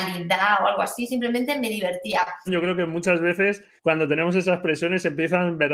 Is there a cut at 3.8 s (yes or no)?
yes